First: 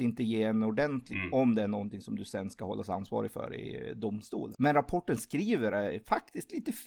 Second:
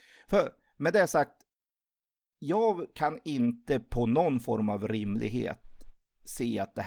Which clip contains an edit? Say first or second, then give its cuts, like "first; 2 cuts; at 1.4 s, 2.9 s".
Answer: first; 2 cuts; at 1.1 s, 4.5 s